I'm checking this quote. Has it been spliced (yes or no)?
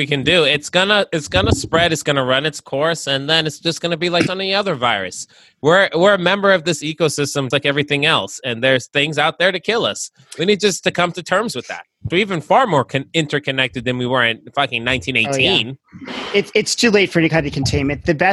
yes